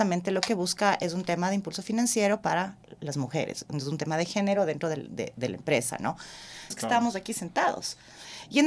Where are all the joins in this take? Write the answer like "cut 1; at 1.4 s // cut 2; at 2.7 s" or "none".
cut 1; at 6.7 s